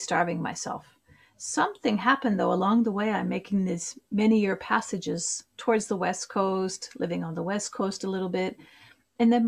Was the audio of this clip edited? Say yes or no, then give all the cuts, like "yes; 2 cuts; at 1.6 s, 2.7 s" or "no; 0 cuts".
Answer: no; 0 cuts